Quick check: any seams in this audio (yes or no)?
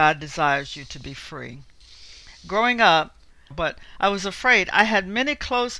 yes